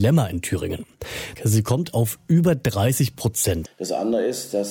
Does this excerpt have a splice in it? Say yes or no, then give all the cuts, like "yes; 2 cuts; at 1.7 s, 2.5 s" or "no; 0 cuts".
yes; 2 cuts; at 1.4 s, 3.7 s